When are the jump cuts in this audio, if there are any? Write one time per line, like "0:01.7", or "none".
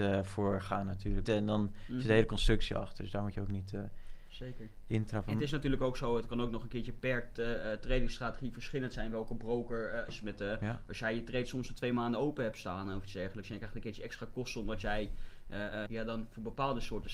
0:01.2
0:10.1
0:15.9